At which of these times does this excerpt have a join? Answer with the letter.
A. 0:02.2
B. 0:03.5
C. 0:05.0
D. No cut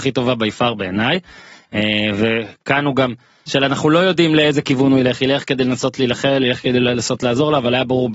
B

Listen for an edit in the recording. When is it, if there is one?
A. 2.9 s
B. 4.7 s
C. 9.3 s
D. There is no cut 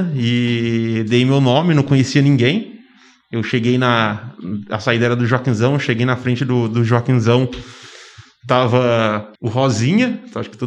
C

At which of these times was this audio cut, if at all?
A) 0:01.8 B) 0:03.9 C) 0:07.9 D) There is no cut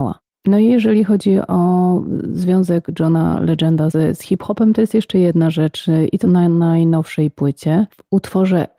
B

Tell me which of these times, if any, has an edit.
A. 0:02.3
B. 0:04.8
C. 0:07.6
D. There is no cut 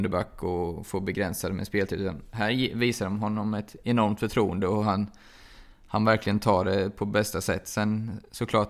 D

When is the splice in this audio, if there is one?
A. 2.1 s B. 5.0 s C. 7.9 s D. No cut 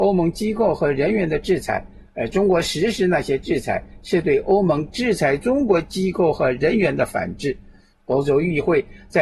C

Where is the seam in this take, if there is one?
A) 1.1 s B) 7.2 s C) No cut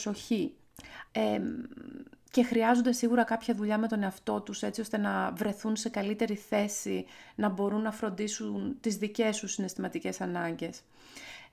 A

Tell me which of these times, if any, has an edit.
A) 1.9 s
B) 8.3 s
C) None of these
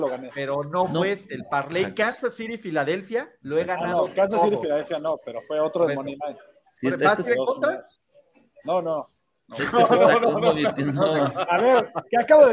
C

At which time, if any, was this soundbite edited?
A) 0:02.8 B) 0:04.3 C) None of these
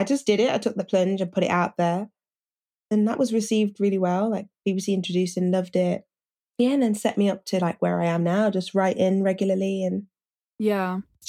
C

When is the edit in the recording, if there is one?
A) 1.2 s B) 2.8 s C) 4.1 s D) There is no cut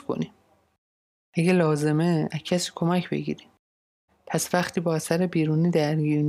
C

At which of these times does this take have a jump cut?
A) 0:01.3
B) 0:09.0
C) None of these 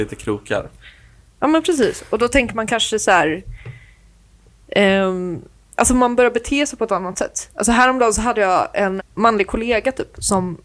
B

